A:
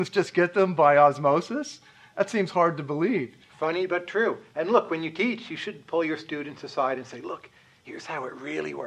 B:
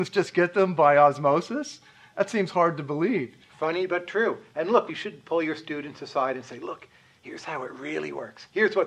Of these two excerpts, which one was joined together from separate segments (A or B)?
B